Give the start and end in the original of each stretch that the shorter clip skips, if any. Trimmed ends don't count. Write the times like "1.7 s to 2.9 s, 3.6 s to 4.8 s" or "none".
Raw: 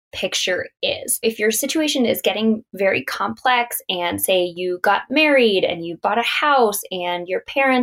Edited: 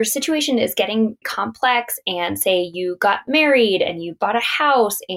2.7 s to 3.0 s